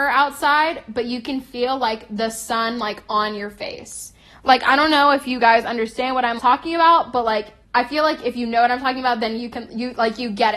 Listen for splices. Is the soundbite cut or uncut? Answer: cut